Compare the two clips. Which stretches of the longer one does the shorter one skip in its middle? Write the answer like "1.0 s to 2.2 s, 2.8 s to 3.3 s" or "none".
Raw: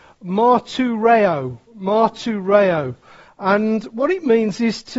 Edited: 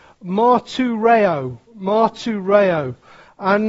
none